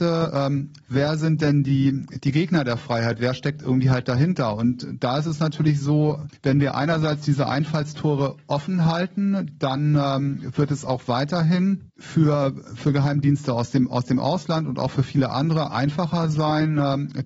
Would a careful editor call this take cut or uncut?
uncut